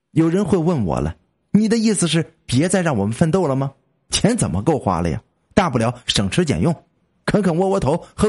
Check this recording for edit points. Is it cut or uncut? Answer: uncut